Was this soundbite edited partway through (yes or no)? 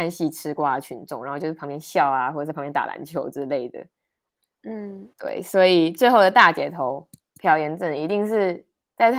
yes